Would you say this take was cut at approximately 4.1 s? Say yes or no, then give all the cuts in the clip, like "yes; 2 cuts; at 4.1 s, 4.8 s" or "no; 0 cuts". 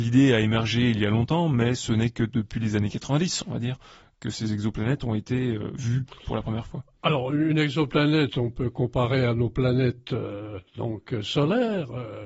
no; 1 cut; at 8.3 s